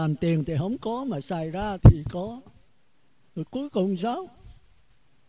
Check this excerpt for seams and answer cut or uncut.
cut